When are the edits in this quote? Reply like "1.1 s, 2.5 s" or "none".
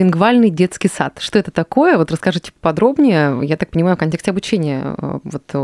none